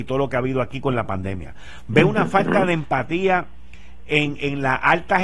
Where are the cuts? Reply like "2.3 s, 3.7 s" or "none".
none